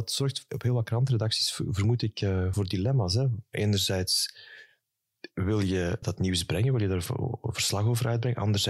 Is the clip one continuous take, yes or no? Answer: no